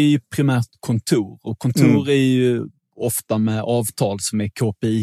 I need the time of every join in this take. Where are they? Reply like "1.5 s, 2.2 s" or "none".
none

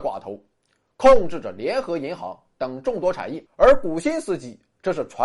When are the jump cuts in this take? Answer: 3.5 s

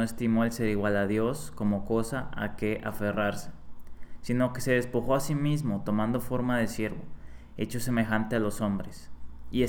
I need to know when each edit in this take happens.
none

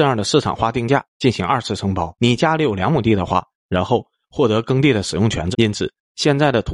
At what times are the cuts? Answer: 2.1 s, 3.5 s, 5.5 s

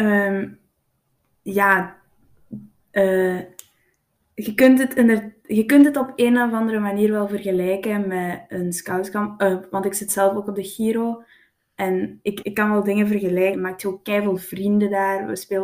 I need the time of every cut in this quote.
12.4 s, 13.5 s

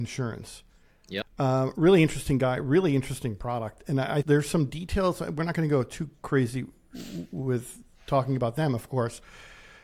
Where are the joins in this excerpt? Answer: 1.2 s, 4.2 s

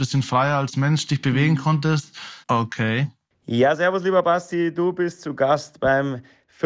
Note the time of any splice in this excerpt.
2.4 s

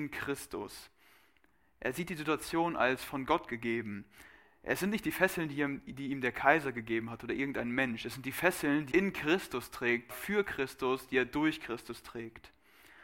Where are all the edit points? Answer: 8.9 s, 10.1 s

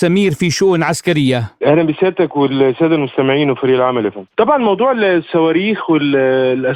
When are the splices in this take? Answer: 4.3 s

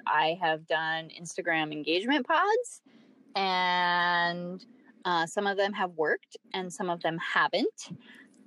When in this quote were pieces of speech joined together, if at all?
none

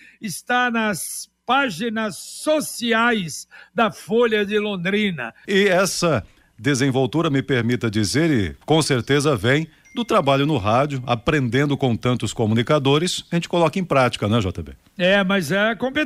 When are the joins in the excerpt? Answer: 5.5 s

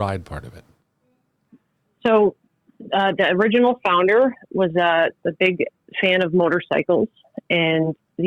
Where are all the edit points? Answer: none

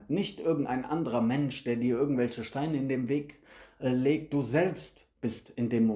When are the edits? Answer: none

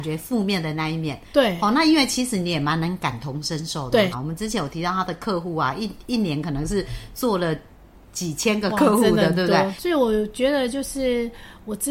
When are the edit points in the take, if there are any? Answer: 4.1 s, 9.8 s

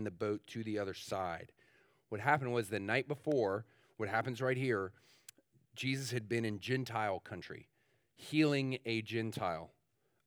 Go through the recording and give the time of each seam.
none

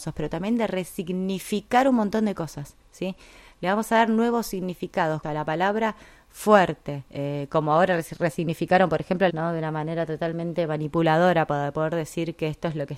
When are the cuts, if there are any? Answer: 5.2 s, 7.1 s, 9.3 s

